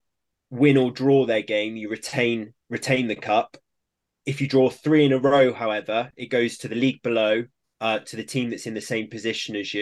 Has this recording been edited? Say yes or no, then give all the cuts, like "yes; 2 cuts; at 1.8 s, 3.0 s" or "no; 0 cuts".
no; 0 cuts